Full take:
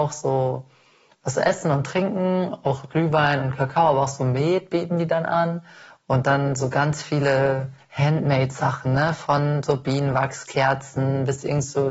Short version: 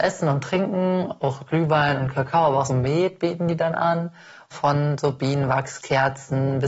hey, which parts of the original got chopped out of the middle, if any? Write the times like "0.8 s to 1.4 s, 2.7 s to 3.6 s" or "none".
4.1 s to 4.2 s, 6.0 s to 9.2 s